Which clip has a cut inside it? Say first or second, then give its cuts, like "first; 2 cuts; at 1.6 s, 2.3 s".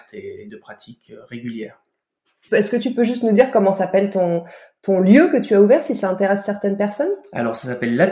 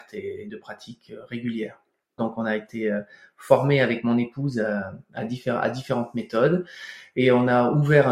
second; 1 cut; at 2.2 s